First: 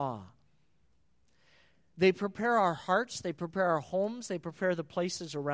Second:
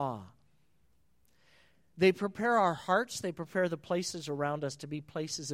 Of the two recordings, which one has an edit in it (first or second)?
second